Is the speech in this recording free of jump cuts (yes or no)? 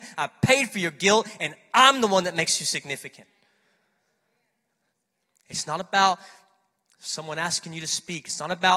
yes